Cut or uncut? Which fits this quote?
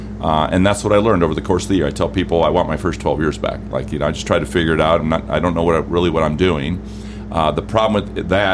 uncut